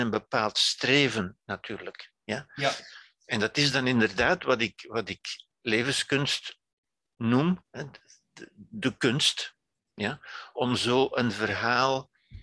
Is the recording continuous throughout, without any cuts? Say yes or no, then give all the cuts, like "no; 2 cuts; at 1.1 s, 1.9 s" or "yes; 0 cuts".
yes; 0 cuts